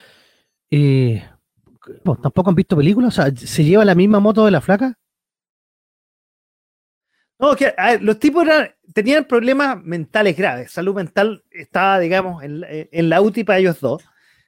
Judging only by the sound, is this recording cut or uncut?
cut